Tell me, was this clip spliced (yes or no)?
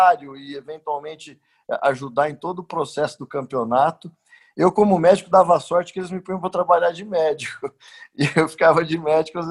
no